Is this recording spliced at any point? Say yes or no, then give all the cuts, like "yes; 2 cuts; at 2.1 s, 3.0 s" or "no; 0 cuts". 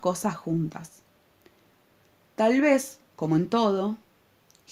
no; 0 cuts